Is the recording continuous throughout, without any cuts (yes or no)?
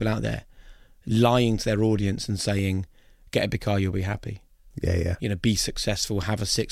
yes